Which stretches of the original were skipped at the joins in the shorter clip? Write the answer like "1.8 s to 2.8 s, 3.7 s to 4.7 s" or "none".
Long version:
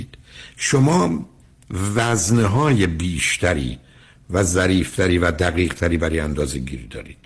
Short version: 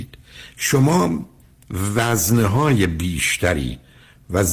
none